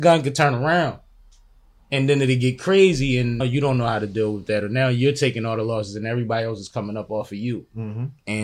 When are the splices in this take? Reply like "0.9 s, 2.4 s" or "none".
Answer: 3.4 s